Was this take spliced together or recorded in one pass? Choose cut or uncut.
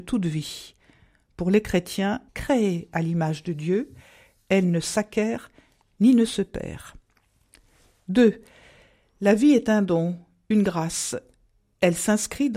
cut